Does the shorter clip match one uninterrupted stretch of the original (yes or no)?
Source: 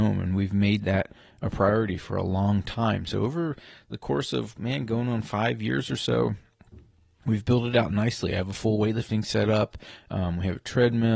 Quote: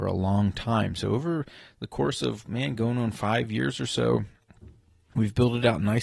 yes